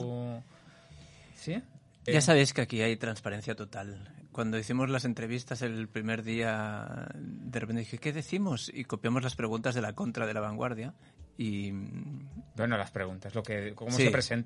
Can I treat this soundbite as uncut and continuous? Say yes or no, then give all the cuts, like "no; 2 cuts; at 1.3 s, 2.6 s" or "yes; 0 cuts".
no; 1 cut; at 2.1 s